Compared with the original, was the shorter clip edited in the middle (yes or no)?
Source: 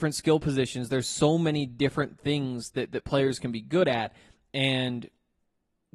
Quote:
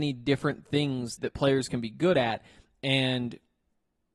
yes